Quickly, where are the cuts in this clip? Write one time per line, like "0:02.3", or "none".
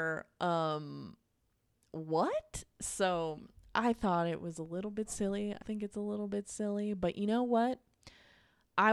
0:05.6